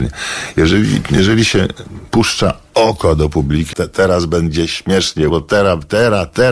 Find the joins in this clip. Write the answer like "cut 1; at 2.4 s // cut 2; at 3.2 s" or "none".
cut 1; at 3.7 s // cut 2; at 5.3 s